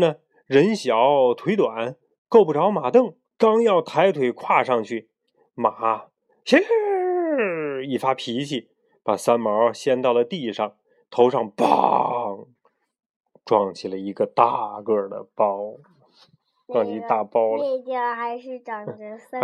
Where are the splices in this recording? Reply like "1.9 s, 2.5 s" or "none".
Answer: 3.3 s